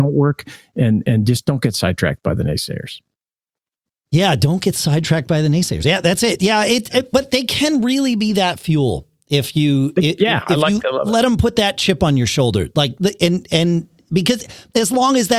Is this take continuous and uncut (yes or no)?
yes